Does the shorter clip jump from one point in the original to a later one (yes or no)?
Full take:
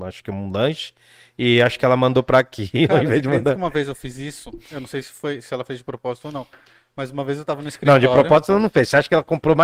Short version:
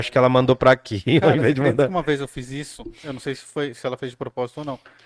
no